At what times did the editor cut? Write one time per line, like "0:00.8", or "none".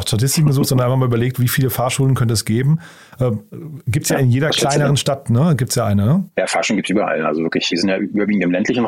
0:06.3
0:07.7